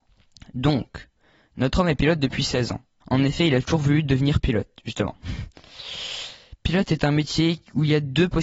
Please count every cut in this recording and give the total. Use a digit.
1